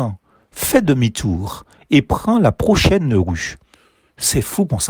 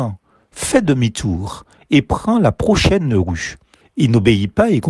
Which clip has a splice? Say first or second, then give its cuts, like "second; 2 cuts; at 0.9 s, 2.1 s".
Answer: second; 1 cut; at 3.8 s